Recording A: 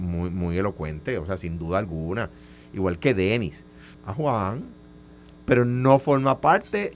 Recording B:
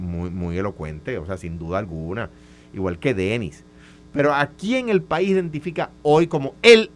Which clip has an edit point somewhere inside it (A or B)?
A